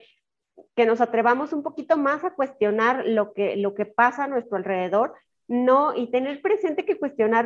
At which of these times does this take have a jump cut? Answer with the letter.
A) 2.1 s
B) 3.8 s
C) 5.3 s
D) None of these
D